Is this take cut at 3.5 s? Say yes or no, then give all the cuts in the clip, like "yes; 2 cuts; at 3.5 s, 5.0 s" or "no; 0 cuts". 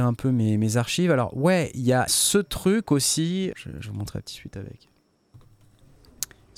yes; 2 cuts; at 2.1 s, 3.5 s